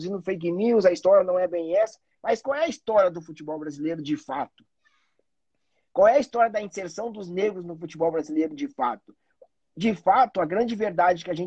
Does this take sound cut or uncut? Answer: uncut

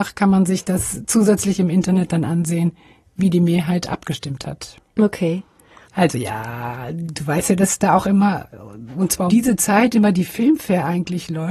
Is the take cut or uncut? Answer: cut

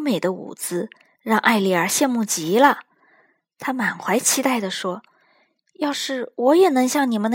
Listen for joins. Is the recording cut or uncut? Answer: uncut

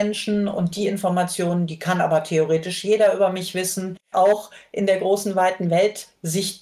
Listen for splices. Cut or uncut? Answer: cut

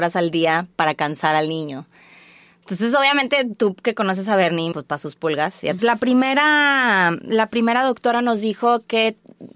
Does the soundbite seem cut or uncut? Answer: cut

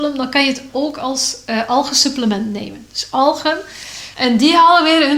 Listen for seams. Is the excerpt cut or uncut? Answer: cut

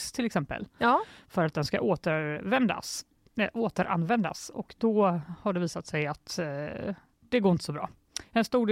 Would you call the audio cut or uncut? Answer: cut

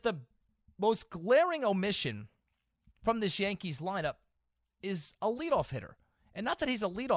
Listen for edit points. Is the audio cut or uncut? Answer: uncut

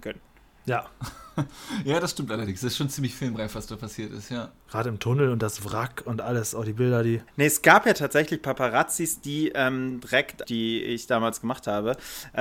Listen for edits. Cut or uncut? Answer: cut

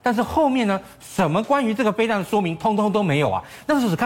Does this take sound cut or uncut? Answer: uncut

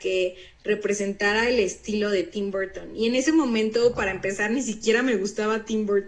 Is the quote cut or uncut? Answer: uncut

